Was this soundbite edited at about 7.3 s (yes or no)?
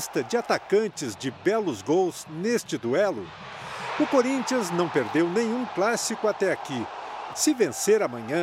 yes